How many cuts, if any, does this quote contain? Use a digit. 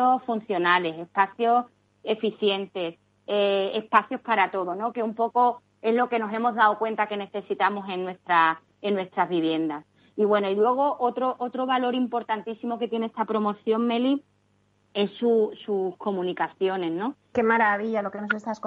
1